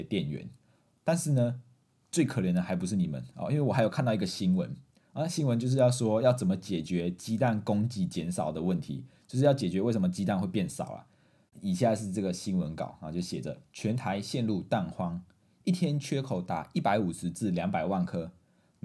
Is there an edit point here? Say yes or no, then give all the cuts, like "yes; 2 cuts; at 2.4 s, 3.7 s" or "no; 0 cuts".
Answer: yes; 2 cuts; at 11.5 s, 13.7 s